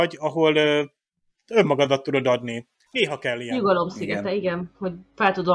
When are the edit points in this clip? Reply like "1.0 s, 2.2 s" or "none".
2.9 s